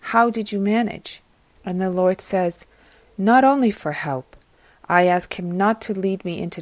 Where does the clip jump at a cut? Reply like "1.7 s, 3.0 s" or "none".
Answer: 1.6 s